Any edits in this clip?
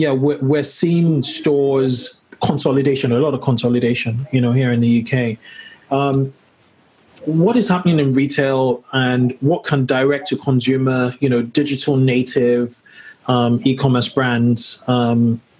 no; 0 cuts

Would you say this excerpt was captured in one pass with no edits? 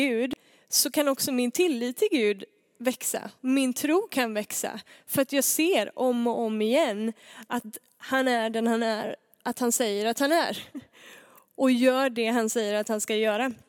yes; 0 cuts

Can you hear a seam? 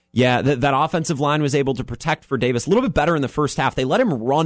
no; 0 cuts

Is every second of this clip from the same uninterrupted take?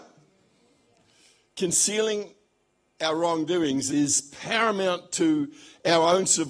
no; 1 cut; at 3.9 s

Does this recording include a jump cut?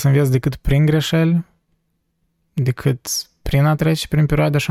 no; 0 cuts

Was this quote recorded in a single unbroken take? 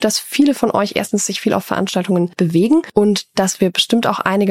yes; 0 cuts

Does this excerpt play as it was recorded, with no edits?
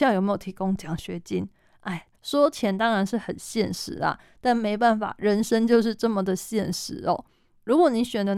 no; 1 cut; at 2.1 s

